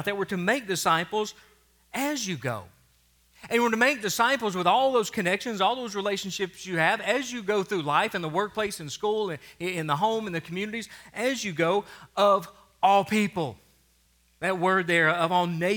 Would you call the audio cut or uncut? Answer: uncut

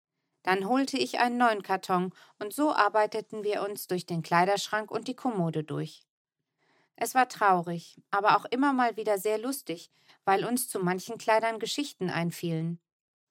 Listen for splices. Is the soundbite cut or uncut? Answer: uncut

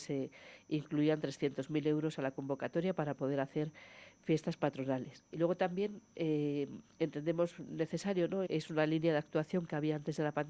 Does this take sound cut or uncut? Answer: cut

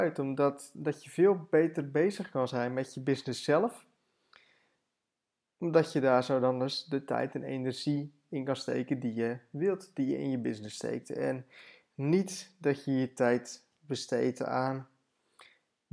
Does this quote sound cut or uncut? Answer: uncut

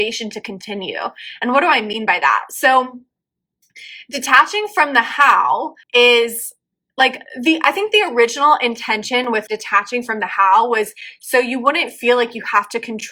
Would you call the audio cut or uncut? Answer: cut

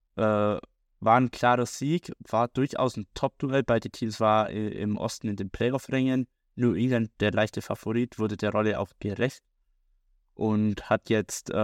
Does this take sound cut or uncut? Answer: uncut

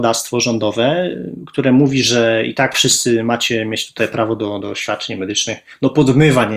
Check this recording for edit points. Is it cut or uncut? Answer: cut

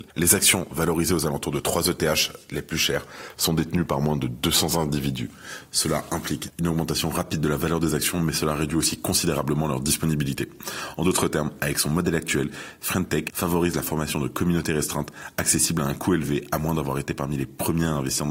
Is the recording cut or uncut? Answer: uncut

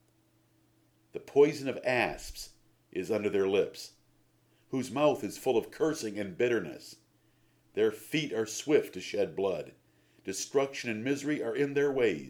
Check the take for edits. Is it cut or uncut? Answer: uncut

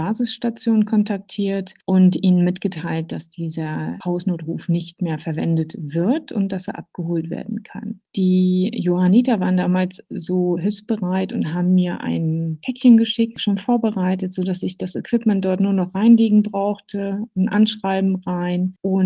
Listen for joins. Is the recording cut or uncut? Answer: cut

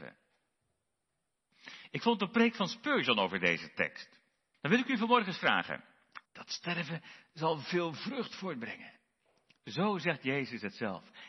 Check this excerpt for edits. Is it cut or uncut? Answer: cut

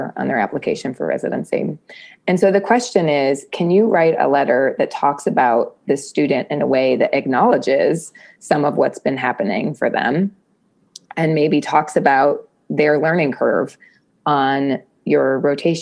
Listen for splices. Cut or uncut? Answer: uncut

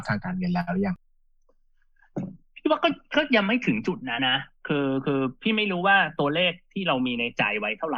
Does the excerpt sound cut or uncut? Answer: cut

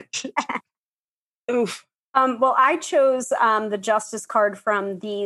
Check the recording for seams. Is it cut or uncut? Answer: uncut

